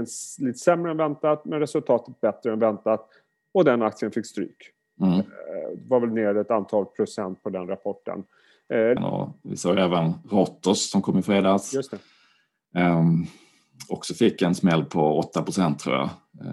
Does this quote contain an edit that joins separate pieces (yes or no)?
yes